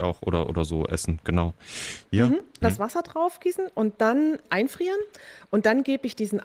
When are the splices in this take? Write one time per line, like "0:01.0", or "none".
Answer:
0:02.6